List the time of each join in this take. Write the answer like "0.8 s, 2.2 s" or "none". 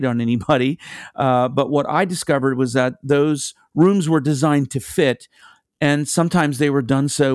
none